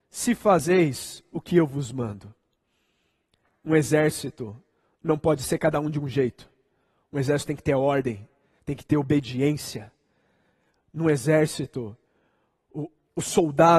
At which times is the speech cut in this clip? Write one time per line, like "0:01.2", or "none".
0:08.5